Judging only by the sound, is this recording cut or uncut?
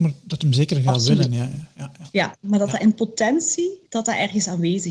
cut